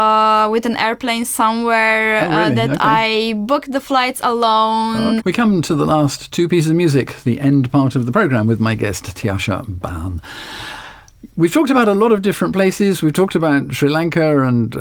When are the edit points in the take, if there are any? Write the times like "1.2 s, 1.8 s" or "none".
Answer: 5.2 s